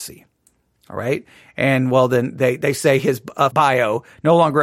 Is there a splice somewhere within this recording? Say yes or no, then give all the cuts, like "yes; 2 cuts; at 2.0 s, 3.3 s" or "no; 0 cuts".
yes; 1 cut; at 3.5 s